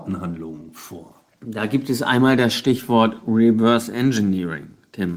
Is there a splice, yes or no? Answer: yes